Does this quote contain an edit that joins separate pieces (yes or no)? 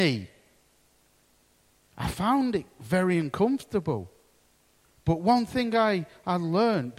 no